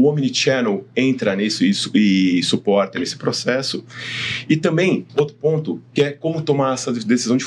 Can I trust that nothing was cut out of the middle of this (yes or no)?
no